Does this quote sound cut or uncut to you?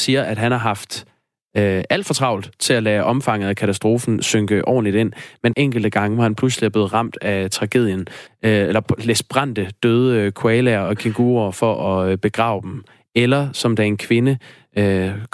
cut